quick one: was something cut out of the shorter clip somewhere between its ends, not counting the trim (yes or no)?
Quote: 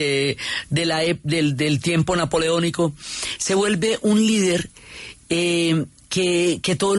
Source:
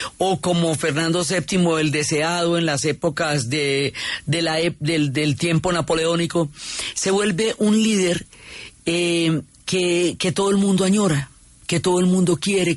no